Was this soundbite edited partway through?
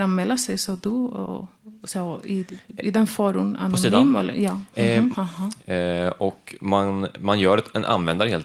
yes; 1 cut; at 5.1 s

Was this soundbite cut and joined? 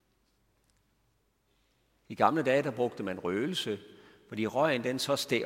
no; 0 cuts

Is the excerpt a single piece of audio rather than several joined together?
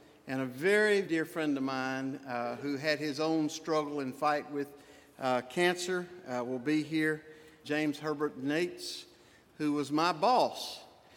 no; 2 cuts; at 1.0 s, 7.6 s

